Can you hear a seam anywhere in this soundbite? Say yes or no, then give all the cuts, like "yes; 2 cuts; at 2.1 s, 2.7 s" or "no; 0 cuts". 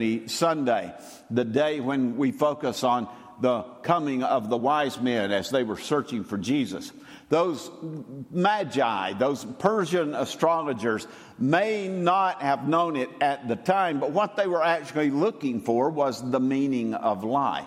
no; 0 cuts